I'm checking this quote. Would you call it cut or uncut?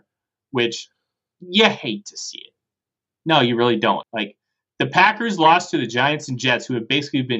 cut